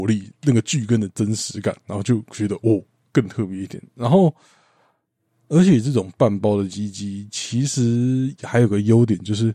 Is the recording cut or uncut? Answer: uncut